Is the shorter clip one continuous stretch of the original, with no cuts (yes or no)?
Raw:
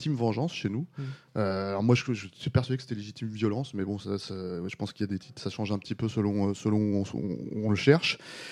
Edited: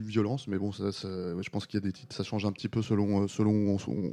yes